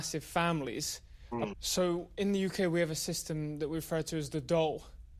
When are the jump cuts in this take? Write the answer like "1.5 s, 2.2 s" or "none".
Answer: 1.5 s